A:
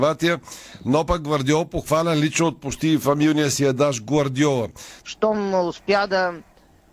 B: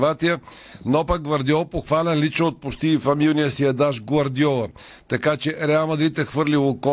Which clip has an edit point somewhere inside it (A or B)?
A